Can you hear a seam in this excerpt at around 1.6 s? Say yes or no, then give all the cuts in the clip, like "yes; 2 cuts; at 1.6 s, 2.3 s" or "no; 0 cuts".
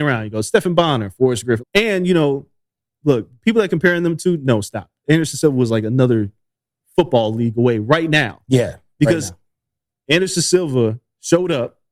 yes; 1 cut; at 1.6 s